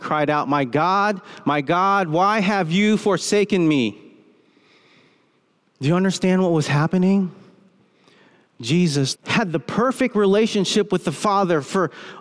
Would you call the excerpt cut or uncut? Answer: cut